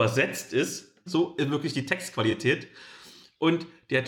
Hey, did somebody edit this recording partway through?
yes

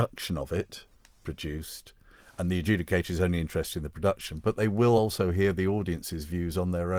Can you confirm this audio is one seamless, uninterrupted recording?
yes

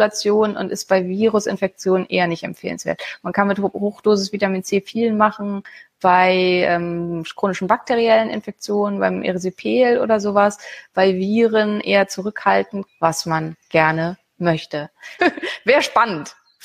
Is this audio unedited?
no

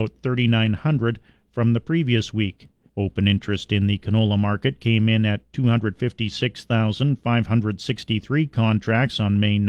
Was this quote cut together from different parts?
yes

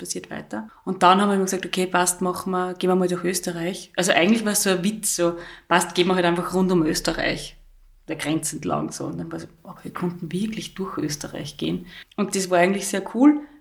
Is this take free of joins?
yes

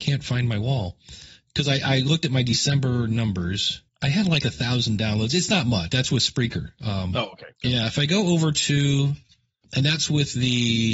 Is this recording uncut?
no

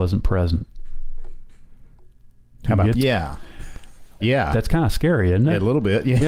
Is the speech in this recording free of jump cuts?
no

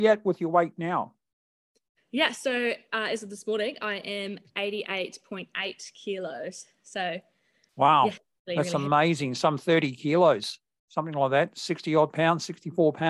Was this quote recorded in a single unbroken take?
yes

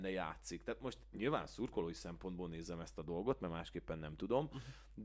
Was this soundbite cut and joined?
no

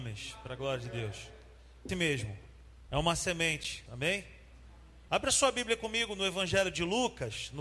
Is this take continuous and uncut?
no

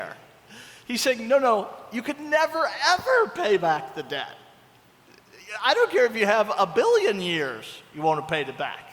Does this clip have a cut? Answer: no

